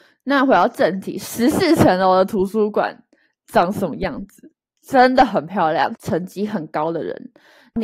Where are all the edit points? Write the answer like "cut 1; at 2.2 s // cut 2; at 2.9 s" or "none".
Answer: cut 1; at 5.9 s